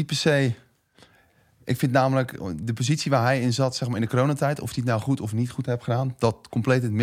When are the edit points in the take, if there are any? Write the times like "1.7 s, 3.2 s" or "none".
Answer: none